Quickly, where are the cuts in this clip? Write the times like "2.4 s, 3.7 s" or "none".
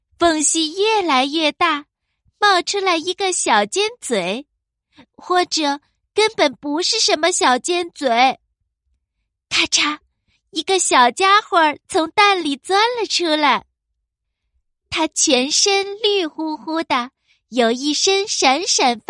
none

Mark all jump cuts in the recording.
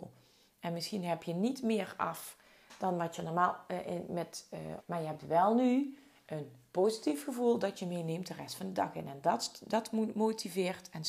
4.8 s

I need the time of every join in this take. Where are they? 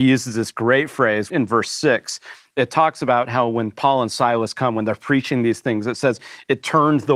1.3 s

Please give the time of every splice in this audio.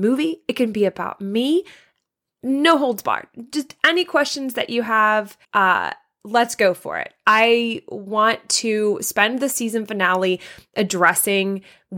5.4 s

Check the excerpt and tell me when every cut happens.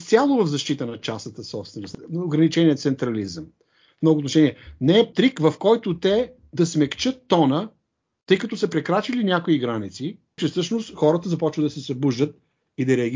5.1 s, 10.4 s

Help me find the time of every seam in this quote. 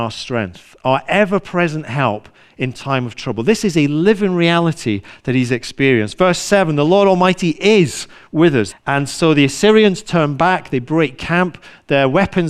8.7 s

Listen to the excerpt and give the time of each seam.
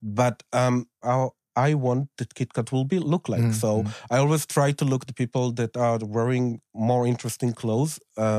1.0 s

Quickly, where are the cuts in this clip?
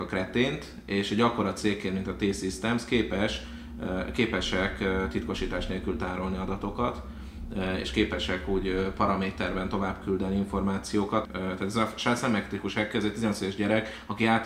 11.2 s

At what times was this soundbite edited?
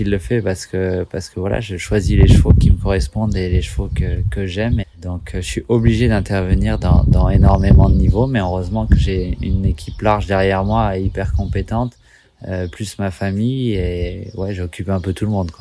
4.8 s

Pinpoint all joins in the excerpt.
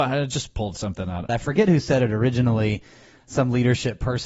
1.3 s

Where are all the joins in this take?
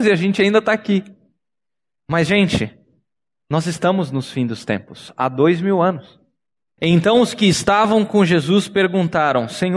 6.8 s

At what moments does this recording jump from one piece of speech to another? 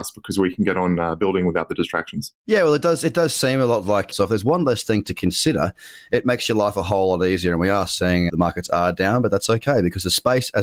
2.4 s, 4.1 s, 8.3 s

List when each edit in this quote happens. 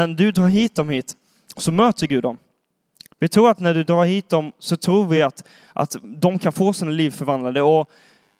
none

